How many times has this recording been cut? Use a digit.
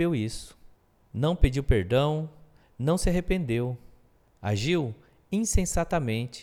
1